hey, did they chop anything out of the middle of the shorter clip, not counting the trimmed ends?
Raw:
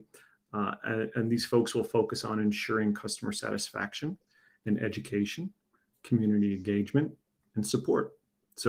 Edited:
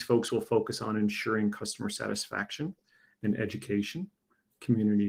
no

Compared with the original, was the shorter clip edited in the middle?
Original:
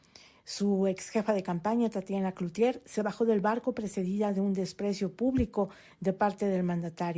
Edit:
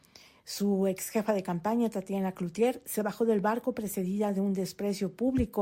no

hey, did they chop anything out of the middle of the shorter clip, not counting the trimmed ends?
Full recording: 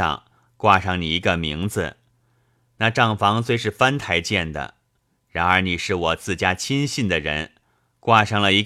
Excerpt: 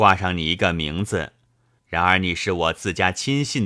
yes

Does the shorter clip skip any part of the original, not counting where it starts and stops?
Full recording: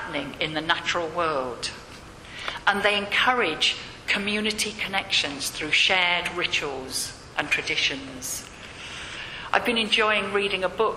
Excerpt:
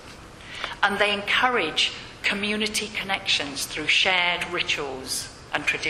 no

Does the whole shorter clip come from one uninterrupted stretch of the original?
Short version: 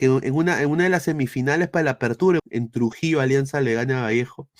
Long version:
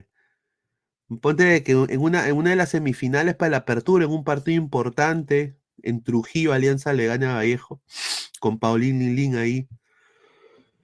no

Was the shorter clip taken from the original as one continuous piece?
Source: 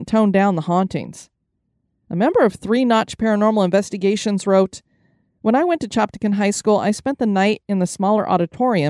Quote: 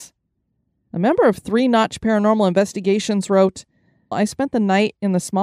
no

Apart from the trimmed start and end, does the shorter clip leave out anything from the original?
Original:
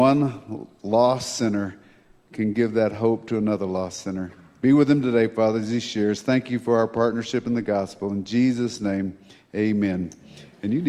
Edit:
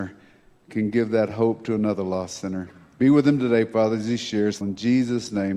yes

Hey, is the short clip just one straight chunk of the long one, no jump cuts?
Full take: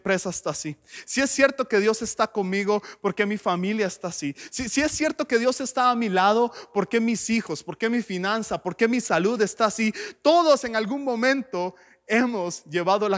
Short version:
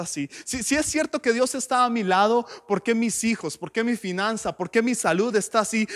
yes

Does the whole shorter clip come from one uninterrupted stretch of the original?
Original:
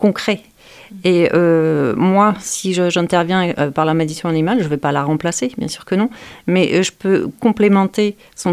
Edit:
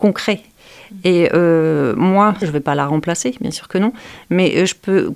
no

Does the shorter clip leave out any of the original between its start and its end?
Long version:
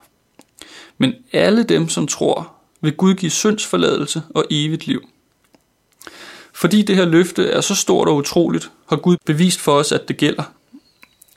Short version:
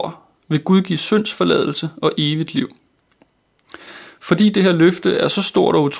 no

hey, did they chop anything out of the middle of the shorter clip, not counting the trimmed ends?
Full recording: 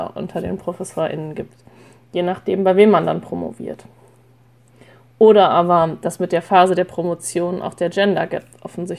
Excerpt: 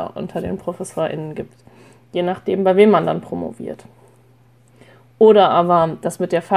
no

